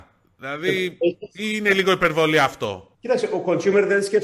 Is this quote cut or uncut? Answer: cut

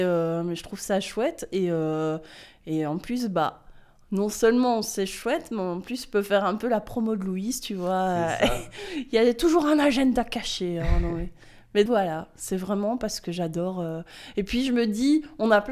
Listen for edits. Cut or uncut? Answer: cut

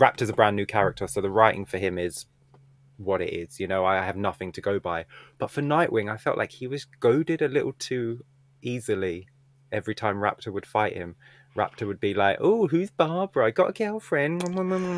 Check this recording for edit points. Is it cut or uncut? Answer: uncut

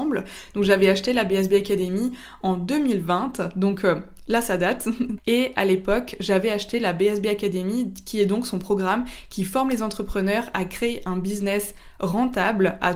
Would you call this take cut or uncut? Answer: cut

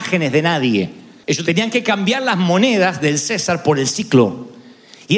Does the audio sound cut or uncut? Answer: cut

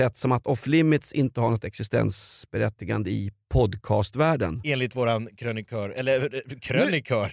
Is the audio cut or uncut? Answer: uncut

